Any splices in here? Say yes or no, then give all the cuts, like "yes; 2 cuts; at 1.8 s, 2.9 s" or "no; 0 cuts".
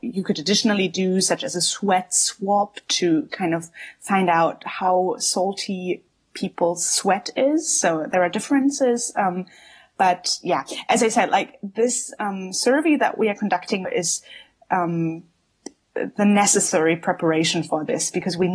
yes; 1 cut; at 13.8 s